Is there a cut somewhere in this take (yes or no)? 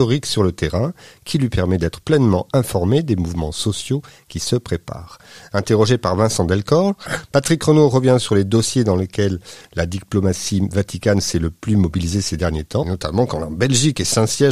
yes